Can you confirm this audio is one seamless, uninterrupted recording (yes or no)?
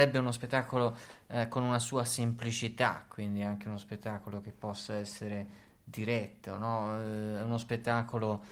yes